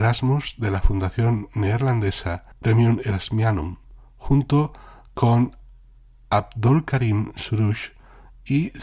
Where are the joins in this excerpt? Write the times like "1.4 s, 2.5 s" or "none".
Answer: 2.5 s